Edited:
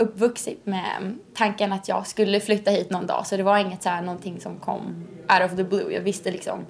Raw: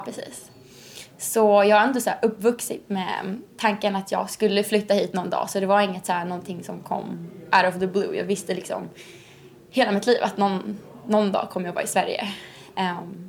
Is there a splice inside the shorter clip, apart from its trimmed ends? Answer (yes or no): no